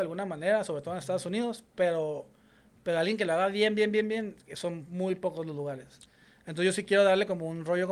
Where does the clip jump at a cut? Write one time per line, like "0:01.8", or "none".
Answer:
none